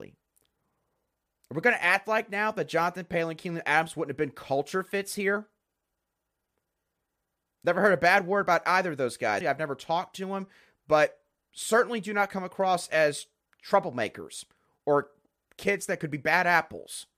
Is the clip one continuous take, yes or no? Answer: no